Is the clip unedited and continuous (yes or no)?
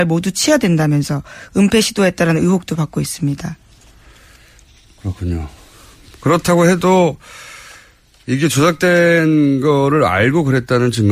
yes